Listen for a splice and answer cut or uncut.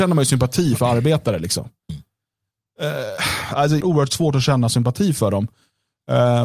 cut